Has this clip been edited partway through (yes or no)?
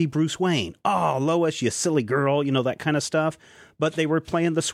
no